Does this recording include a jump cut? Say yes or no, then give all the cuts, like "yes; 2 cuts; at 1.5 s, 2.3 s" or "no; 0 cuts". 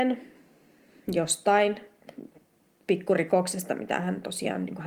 no; 0 cuts